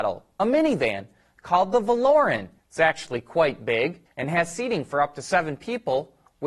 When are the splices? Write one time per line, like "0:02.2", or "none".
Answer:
0:02.6
0:04.1